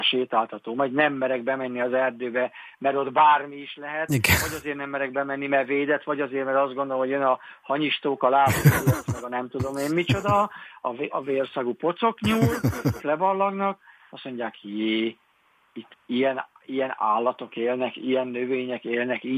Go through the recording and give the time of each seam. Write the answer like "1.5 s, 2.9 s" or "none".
11.1 s, 13.0 s